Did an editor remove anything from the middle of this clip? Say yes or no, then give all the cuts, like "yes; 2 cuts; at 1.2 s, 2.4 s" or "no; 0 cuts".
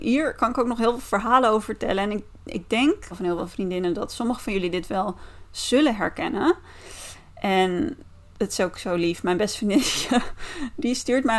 yes; 1 cut; at 3.1 s